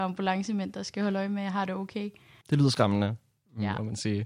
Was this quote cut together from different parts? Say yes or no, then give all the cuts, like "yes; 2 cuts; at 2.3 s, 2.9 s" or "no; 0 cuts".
yes; 1 cut; at 2.4 s